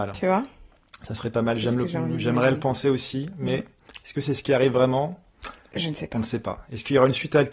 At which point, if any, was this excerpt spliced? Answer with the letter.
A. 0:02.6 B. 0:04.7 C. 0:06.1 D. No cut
D